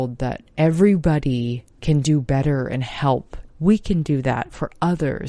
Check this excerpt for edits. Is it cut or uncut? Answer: cut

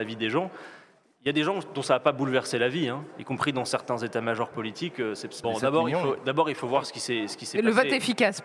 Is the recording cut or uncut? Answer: cut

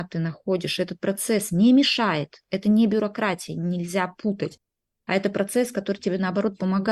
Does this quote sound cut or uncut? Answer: uncut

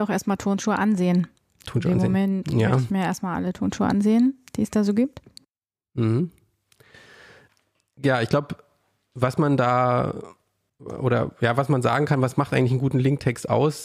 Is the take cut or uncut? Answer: uncut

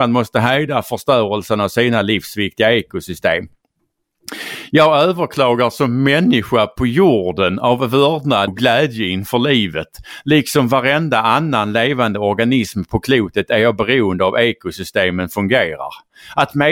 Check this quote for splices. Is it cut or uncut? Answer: cut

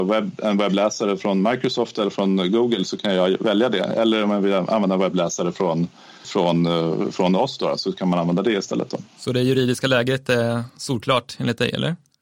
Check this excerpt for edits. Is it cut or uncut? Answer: cut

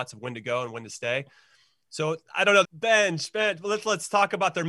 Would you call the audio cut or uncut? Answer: cut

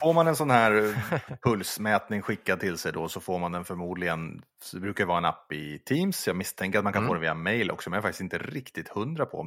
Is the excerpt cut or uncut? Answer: uncut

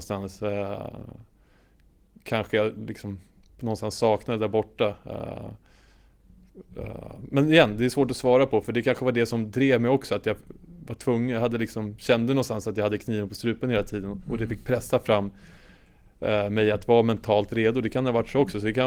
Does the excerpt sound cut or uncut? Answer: uncut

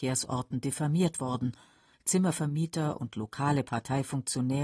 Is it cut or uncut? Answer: cut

